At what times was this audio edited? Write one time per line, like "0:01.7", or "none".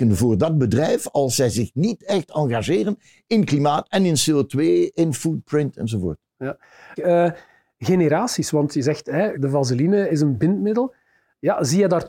0:07.0
0:09.3